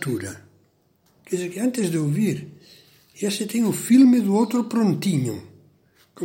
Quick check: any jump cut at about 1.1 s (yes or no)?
yes